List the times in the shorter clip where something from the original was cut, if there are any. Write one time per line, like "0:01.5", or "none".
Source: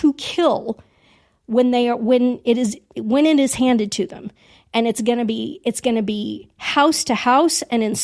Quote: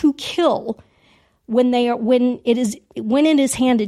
none

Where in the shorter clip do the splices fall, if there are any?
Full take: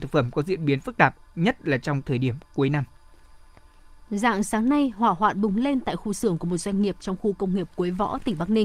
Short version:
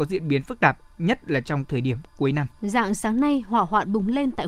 0:02.5

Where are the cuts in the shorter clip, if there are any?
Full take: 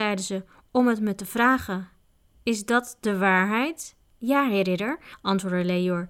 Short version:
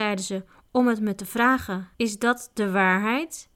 0:01.9

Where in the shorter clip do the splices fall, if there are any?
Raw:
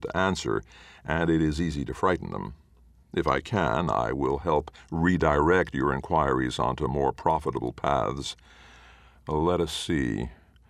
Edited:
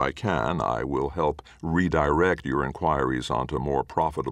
none

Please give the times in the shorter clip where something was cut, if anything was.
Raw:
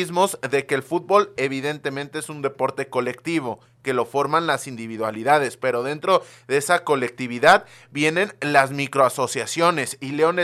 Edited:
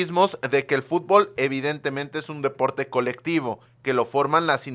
none

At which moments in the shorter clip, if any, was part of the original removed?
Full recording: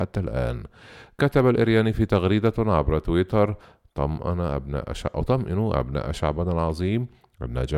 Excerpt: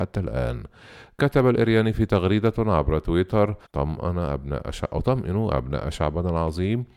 0:03.7

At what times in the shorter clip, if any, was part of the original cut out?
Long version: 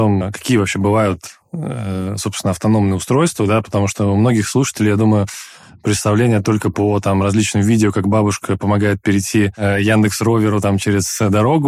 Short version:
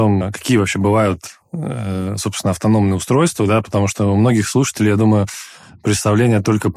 none

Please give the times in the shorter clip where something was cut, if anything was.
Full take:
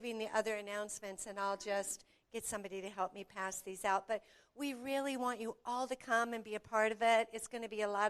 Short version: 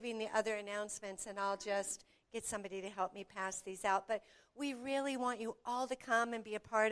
none

